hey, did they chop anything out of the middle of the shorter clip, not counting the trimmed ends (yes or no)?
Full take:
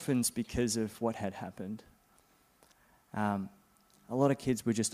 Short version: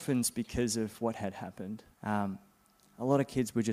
yes